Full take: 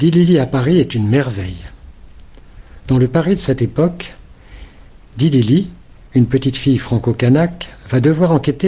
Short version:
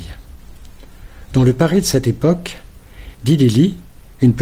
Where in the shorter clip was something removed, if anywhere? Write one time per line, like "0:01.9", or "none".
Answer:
0:03.1